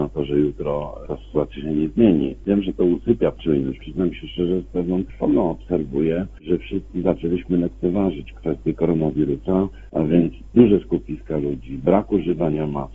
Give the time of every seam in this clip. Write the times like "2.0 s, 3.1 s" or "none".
3.8 s

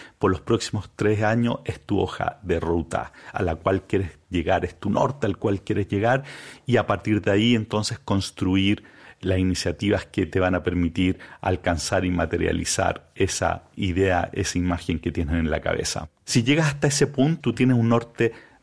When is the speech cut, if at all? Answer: 17.4 s

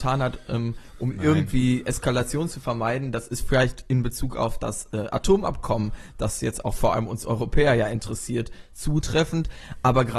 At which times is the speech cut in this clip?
none

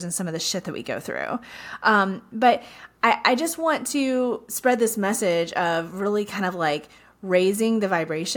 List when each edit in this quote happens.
none

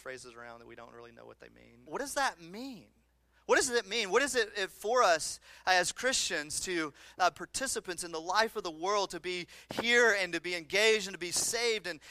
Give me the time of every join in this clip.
1.9 s, 7.3 s

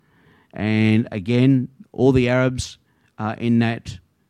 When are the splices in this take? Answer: none

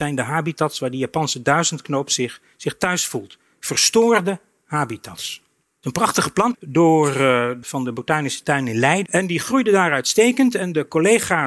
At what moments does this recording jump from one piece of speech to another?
6.5 s, 7.6 s, 9.1 s

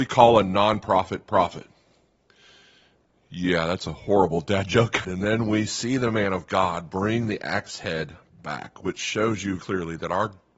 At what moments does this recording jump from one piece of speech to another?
5.0 s, 9.6 s

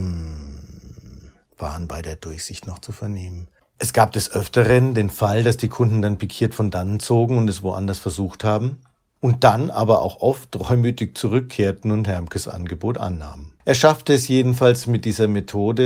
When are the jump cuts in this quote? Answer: 3.6 s, 13.6 s

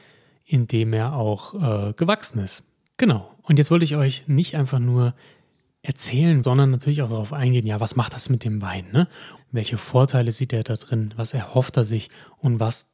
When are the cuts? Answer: 2.9 s, 6.4 s, 9.4 s

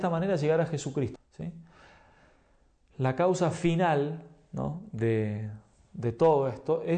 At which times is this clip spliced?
1.2 s

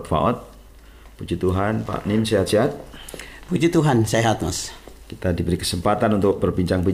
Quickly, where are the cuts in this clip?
5.0 s

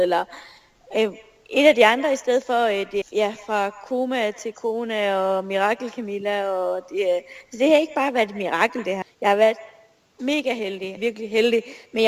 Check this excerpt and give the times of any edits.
3.0 s, 9.0 s, 11.0 s

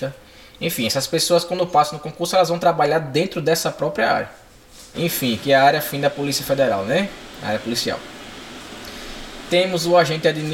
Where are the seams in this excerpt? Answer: 4.9 s

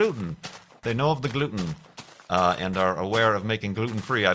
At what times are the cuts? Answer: none

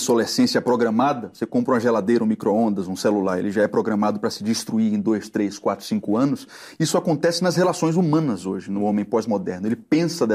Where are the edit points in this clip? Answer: none

